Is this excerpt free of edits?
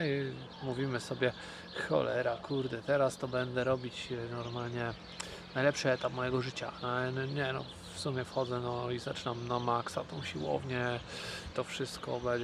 no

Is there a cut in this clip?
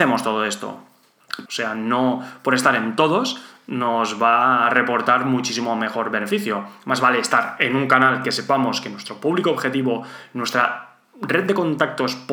yes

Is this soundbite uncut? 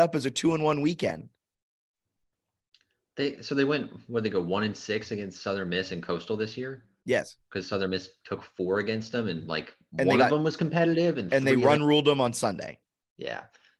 yes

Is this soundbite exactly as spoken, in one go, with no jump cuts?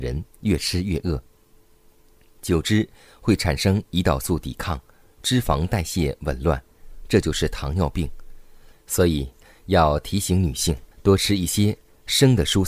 no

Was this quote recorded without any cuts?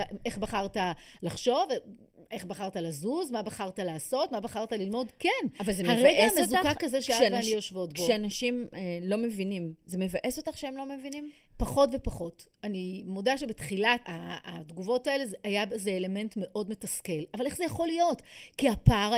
no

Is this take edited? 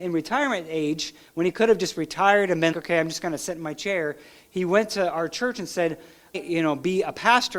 yes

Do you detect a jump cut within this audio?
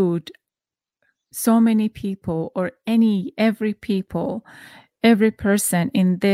no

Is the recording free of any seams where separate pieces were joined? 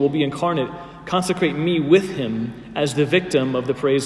yes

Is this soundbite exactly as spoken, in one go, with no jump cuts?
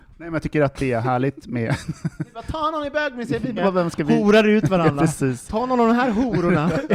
no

